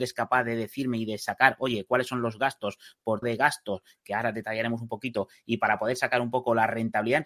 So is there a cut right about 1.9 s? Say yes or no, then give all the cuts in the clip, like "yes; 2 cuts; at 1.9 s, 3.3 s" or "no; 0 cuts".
no; 1 cut; at 3.2 s